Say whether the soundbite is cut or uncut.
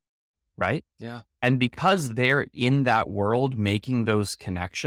uncut